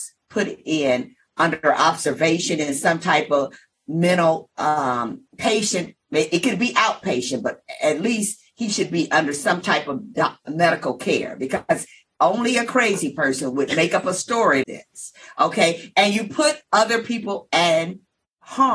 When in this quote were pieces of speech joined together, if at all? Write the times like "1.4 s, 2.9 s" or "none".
5.3 s, 14.6 s